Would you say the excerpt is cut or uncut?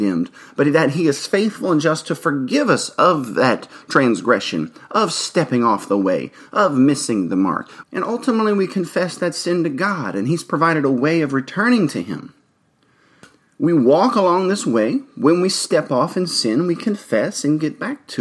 cut